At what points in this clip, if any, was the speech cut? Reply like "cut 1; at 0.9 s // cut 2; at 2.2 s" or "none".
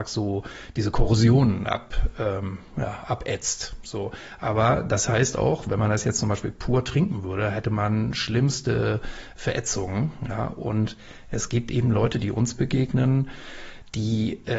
none